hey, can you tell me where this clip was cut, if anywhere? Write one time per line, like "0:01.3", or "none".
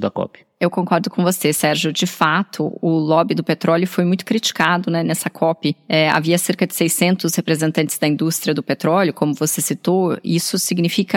none